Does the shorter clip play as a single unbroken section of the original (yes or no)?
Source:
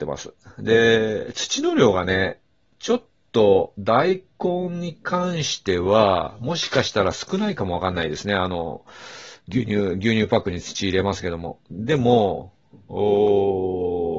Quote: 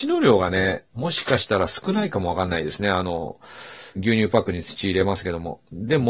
no